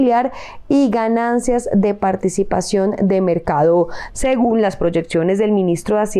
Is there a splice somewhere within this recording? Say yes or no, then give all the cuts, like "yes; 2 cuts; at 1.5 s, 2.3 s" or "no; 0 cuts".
yes; 1 cut; at 4.1 s